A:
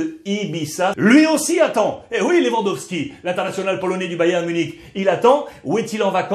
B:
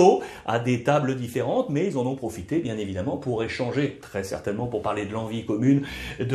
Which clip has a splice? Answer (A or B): A